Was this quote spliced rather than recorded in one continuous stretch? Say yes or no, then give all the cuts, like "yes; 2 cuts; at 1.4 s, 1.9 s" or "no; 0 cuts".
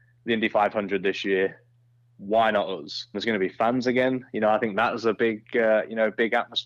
yes; 1 cut; at 3.1 s